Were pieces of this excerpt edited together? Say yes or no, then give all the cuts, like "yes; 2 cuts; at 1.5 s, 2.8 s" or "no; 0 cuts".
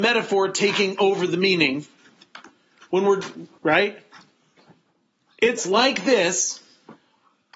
yes; 1 cut; at 3.6 s